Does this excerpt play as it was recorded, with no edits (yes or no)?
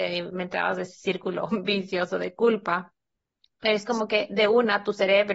yes